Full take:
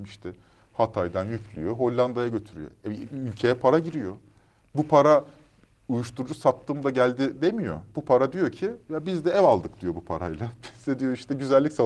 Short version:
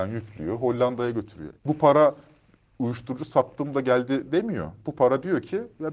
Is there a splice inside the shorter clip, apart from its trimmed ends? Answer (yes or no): yes